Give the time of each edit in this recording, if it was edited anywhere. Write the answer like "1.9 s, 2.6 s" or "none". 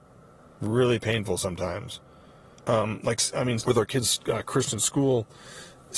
2.6 s, 3.6 s